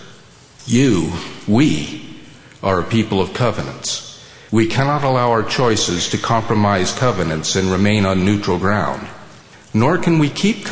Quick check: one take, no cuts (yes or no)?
yes